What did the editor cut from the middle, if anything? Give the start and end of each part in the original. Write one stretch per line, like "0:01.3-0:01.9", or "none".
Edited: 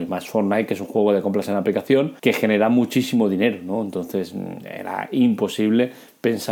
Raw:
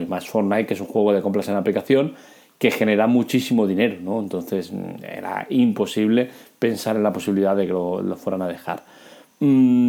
0:02.2-0:02.6